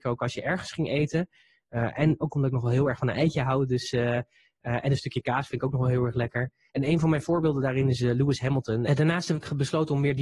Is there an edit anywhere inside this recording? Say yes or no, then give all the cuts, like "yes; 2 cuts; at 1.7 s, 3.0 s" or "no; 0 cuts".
yes; 2 cuts; at 6.7 s, 8.9 s